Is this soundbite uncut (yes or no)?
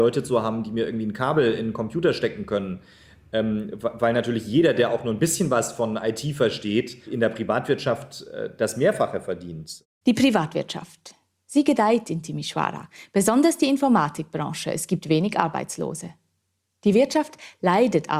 yes